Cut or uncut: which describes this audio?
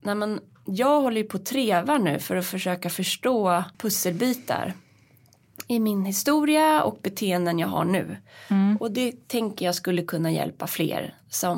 cut